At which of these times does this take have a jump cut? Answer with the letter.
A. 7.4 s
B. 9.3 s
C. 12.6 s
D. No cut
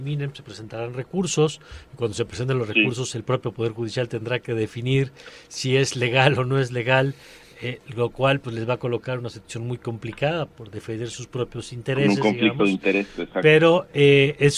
D